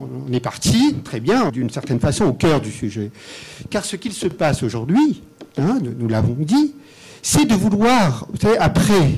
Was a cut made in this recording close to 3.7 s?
no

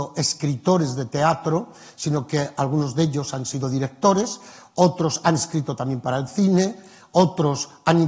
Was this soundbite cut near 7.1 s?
no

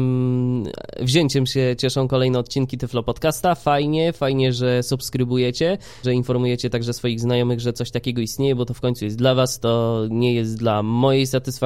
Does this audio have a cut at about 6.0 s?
yes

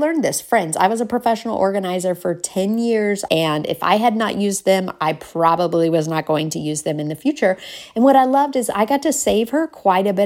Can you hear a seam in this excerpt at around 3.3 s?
yes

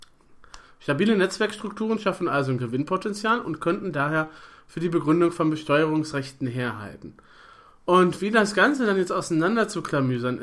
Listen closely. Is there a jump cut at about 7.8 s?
no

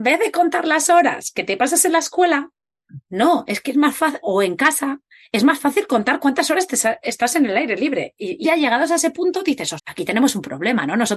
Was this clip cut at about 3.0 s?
no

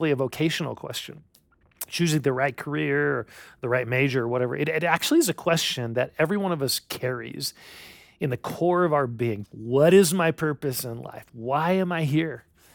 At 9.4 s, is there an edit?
yes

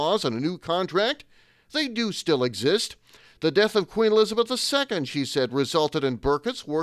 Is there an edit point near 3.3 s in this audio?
no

